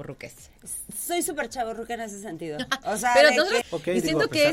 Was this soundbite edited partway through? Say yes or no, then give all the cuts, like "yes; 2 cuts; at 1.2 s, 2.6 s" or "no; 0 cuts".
yes; 1 cut; at 3.6 s